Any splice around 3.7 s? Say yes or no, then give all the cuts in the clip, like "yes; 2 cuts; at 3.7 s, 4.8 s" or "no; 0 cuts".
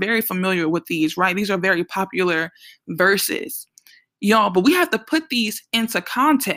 no; 0 cuts